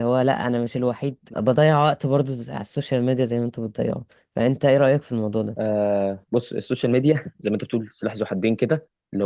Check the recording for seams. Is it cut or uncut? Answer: cut